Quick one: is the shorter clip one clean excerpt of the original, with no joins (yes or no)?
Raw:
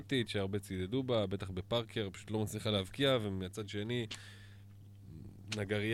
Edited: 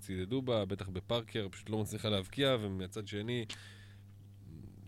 yes